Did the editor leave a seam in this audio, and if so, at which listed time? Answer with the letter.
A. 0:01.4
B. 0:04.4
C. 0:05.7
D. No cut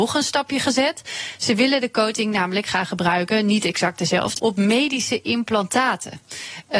B